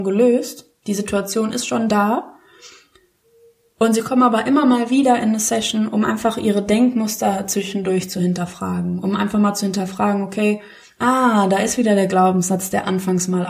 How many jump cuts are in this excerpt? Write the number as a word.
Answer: zero